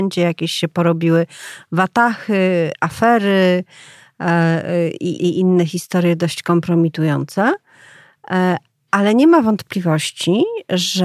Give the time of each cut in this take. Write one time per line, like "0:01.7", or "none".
0:05.2